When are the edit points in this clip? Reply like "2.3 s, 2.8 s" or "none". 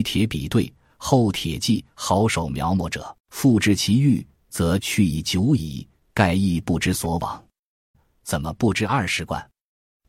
3.2 s, 7.9 s